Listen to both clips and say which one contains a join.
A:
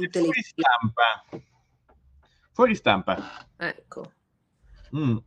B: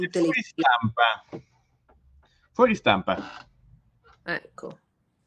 A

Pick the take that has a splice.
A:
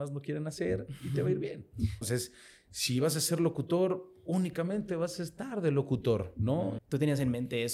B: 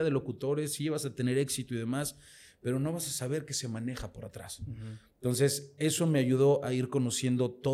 A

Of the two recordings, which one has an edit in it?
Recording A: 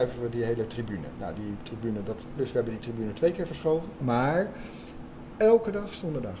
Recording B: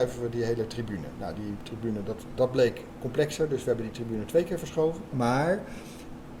A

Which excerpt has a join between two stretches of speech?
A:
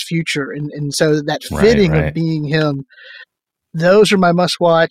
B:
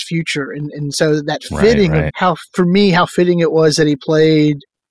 B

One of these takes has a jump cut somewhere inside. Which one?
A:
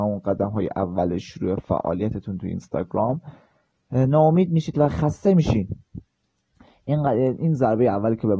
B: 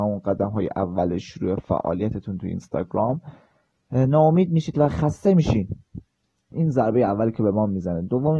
B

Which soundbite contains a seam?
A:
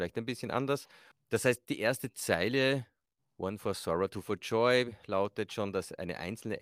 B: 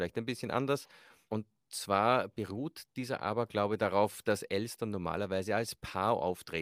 A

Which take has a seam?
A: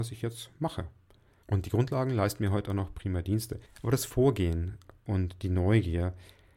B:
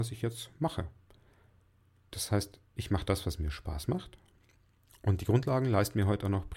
A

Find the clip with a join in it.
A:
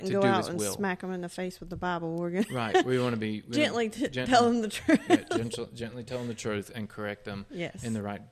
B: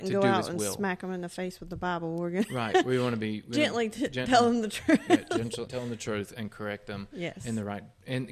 B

